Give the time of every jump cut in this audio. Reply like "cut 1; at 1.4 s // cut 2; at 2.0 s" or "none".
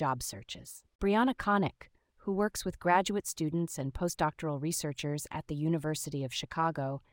cut 1; at 0.9 s